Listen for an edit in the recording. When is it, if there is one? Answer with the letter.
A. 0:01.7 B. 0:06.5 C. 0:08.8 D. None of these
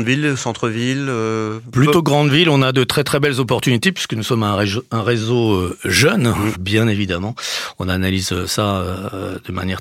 B